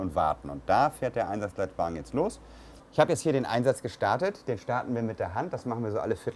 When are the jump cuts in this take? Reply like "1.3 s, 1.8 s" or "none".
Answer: 2.8 s